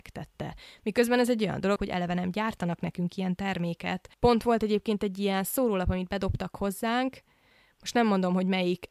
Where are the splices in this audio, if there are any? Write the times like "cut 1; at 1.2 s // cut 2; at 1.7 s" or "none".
cut 1; at 1.8 s